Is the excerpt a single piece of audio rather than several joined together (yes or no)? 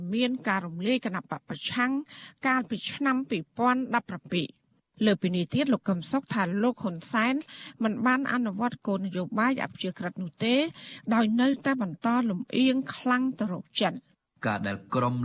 yes